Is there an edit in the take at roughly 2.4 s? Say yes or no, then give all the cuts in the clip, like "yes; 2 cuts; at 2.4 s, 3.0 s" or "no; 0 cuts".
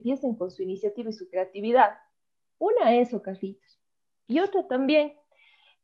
no; 0 cuts